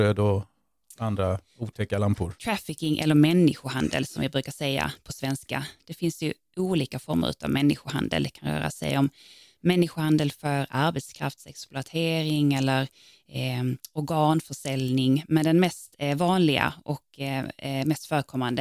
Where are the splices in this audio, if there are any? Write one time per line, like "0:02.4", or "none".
0:02.4

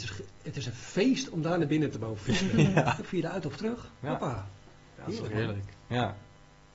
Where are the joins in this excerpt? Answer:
0:03.0

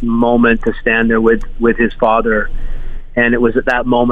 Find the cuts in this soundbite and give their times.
none

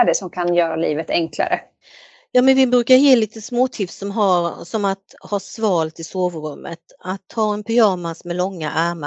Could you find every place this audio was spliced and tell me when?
none

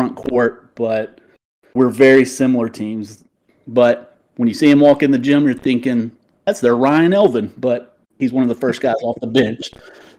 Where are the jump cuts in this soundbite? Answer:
0:03.5

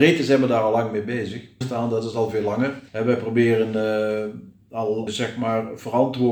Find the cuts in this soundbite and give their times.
0:01.6
0:02.9
0:05.1

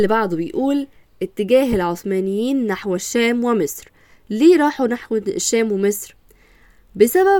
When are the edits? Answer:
none

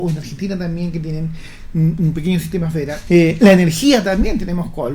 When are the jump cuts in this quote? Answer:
0:03.1

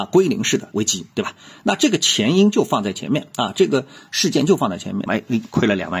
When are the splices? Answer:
0:01.1
0:05.1

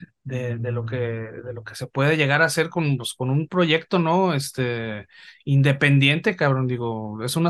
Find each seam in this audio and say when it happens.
none

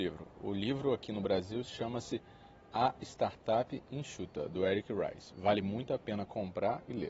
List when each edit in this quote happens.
none

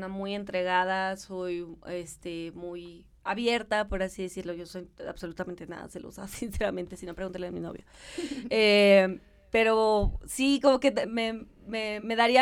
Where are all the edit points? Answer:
0:11.0

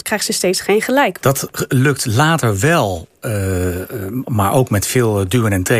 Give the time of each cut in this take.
0:01.2

